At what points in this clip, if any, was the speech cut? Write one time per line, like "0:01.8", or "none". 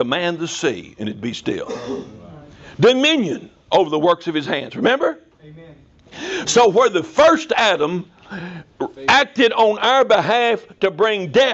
0:05.3
0:06.4